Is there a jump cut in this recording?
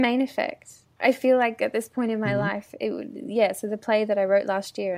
no; 0 cuts

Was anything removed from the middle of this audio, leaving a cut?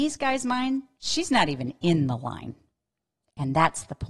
no; 0 cuts

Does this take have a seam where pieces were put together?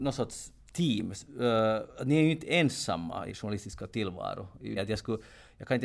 yes; 3 cuts; at 1.9 s, 3.3 s, 4.8 s

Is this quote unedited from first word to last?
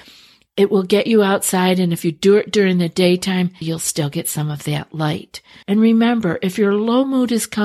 no; 2 cuts; at 3.6 s, 5.6 s

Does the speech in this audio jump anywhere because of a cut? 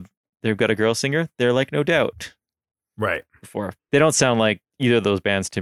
yes; 1 cut; at 3.8 s

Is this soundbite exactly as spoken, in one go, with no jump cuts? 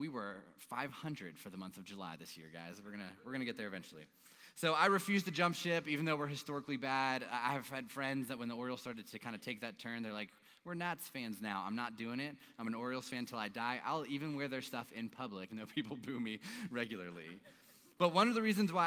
no; 1 cut; at 15.5 s

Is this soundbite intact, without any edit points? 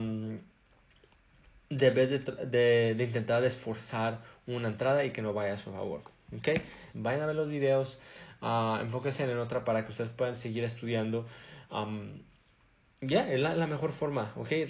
no; 1 cut; at 6.9 s

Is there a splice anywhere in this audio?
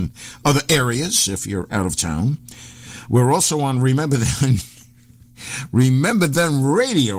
no; 0 cuts

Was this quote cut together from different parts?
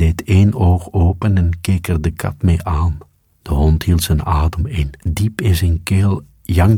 yes; 2 cuts; at 3.3 s, 5.0 s

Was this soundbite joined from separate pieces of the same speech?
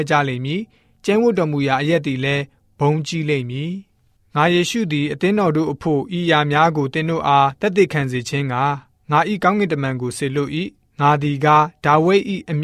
no; 0 cuts

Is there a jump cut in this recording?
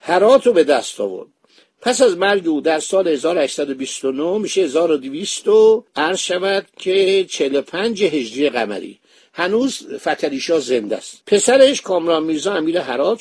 yes; 2 cuts; at 5.9 s, 11.2 s

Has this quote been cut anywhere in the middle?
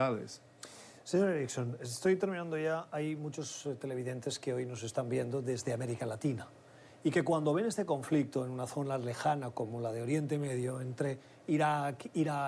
no; 0 cuts

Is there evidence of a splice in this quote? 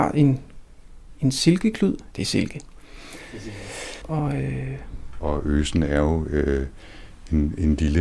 yes; 3 cuts; at 2.1 s, 4.0 s, 5.2 s

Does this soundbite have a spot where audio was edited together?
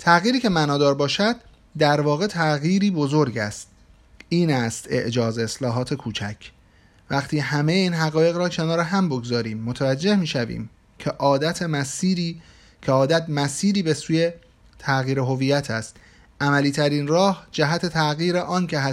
no; 0 cuts

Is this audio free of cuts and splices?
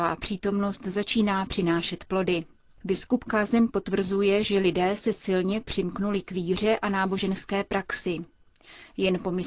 yes; 0 cuts

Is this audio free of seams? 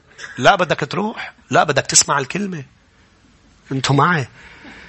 yes; 0 cuts

